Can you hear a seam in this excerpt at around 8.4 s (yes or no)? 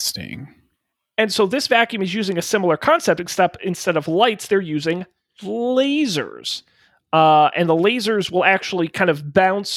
no